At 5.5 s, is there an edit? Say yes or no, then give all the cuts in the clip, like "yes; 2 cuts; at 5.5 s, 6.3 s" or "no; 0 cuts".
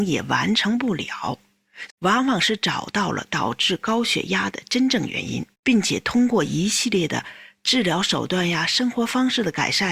yes; 2 cuts; at 1.9 s, 5.5 s